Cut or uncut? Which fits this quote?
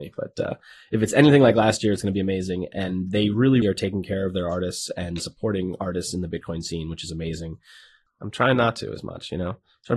cut